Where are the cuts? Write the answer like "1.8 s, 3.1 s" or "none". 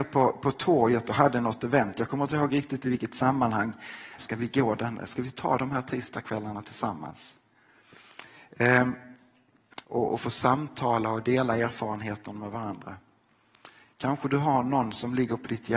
4.2 s, 9.8 s